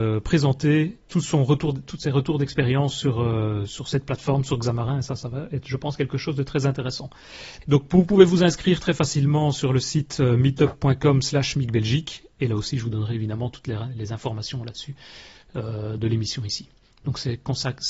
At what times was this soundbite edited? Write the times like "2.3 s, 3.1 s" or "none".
7.6 s, 16.0 s